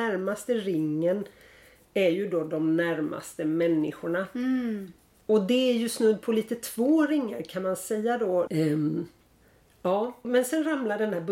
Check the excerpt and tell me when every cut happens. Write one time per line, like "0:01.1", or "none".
0:08.5
0:10.2